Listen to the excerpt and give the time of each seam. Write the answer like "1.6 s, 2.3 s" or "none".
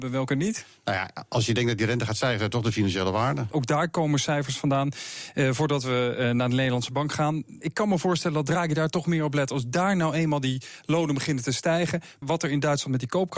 3.5 s, 7.6 s, 12.2 s